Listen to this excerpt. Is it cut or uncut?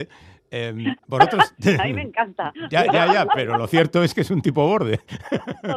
uncut